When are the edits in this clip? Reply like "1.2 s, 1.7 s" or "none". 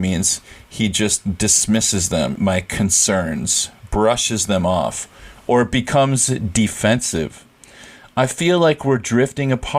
2.4 s